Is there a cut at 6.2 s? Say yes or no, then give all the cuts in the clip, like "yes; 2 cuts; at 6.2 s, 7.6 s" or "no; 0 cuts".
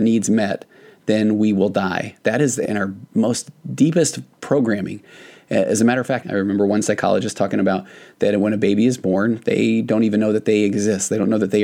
yes; 1 cut; at 6.2 s